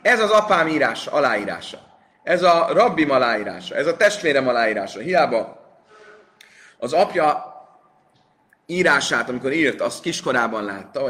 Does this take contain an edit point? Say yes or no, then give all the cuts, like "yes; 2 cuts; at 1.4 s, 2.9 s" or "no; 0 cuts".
no; 0 cuts